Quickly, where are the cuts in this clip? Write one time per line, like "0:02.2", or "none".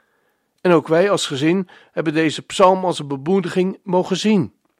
none